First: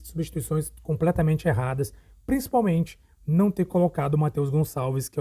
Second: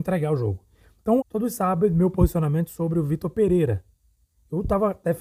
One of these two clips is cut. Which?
second; 1 cut; at 1.2 s

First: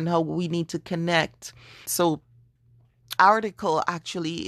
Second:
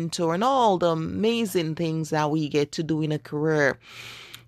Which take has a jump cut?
first; 2 cuts; at 1.9 s, 3.2 s

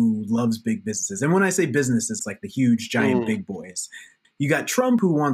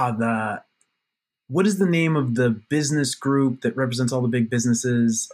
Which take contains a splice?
first; 2 cuts; at 2.2 s, 4.2 s

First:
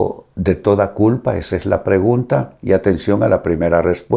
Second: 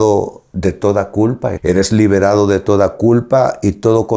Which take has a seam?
second; 1 cut; at 1.6 s

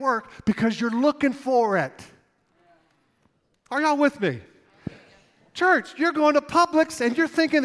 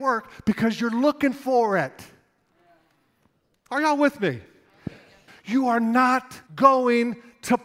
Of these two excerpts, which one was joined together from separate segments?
second; 2 cuts; at 5.3 s, 6.5 s

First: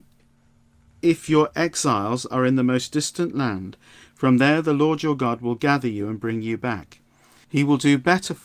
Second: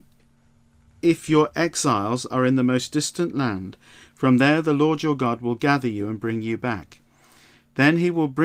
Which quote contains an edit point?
first; 1 cut; at 7.4 s

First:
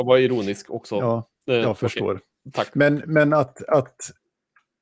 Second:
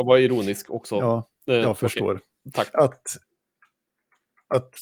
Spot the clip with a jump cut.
second; 1 cut; at 2.7 s

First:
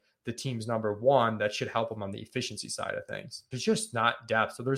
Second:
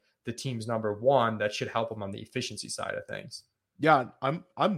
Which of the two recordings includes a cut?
first; 1 cut; at 3.5 s

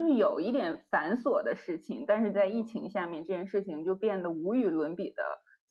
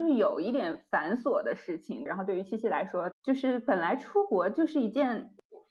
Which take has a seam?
second; 2 cuts; at 2.1 s, 3.1 s

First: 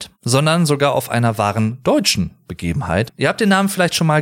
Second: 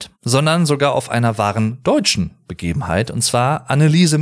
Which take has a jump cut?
first; 1 cut; at 3.1 s

